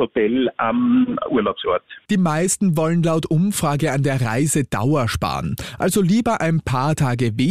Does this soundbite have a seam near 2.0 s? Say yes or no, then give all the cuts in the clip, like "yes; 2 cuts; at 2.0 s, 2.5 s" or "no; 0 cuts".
no; 0 cuts